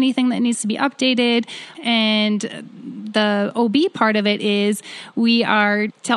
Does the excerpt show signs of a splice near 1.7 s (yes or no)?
yes